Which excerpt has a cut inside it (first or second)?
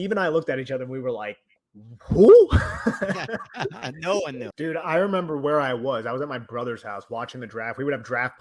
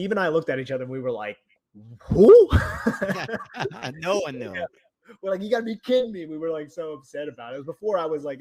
first